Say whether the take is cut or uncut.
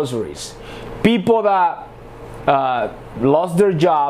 cut